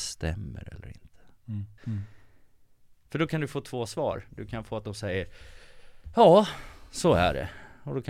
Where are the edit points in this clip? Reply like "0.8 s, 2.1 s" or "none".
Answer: 1.8 s